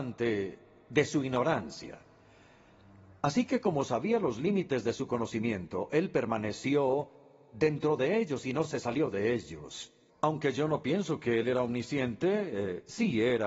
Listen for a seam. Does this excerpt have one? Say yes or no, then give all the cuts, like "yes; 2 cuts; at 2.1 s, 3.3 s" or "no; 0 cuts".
yes; 1 cut; at 10.1 s